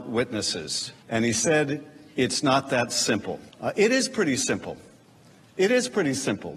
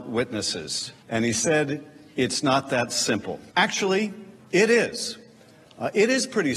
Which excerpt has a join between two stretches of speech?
first; 1 cut; at 3.5 s

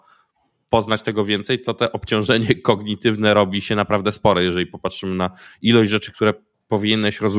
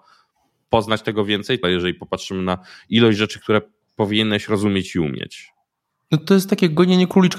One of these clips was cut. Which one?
second; 1 cut; at 1.6 s

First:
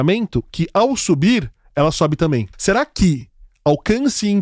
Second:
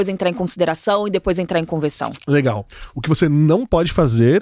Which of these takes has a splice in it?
first; 1 cut; at 2.5 s

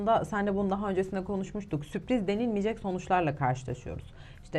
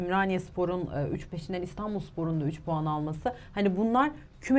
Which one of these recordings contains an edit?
second; 1 cut; at 1.3 s

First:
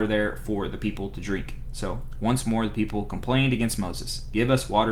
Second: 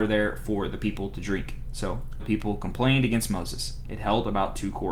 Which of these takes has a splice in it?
second; 2 cuts; at 2.2 s, 3.8 s

